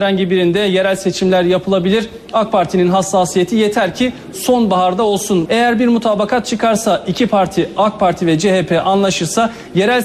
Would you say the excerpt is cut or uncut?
cut